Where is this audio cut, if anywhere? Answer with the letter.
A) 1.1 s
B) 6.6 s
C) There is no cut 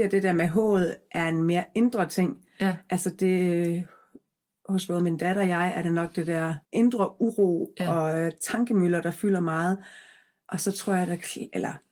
B